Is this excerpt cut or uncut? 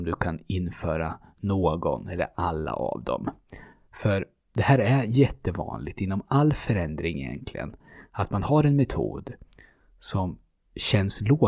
uncut